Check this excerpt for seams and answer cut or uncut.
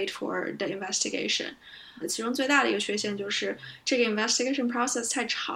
cut